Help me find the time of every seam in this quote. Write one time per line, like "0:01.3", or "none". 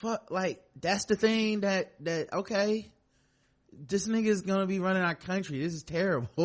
none